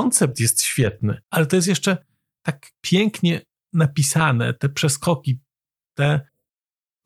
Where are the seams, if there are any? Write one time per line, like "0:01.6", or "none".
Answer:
0:01.2